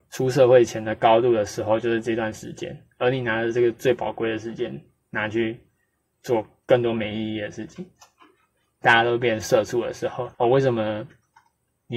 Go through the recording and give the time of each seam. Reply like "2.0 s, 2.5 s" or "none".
8.8 s, 10.3 s